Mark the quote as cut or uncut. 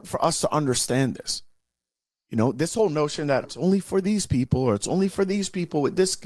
cut